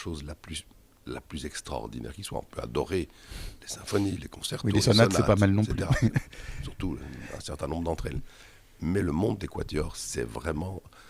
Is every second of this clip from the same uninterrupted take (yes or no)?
yes